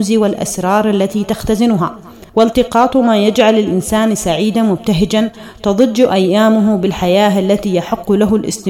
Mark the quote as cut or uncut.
cut